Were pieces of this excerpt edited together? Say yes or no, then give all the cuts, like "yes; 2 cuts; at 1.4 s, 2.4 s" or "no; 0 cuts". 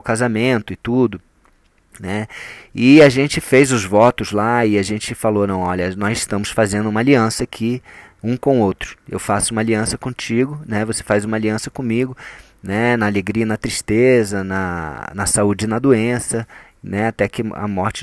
no; 0 cuts